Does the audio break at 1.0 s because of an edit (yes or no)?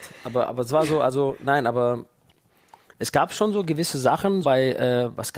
no